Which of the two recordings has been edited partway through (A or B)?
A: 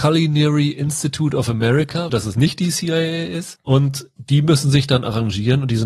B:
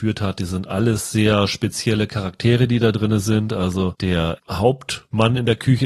A